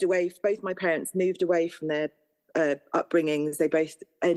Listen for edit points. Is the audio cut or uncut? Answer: uncut